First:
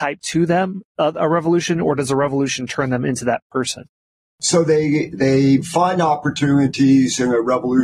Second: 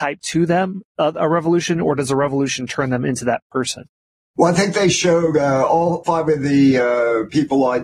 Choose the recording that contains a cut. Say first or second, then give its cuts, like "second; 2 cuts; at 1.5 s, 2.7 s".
first; 1 cut; at 4.2 s